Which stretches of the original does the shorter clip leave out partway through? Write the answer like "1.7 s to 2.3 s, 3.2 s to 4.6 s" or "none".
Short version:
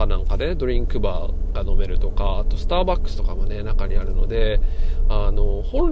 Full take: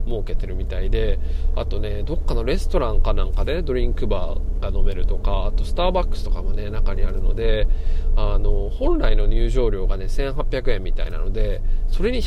none